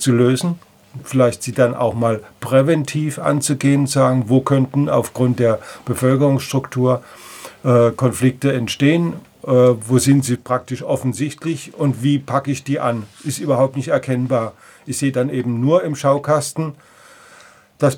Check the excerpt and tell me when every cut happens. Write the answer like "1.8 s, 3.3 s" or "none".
none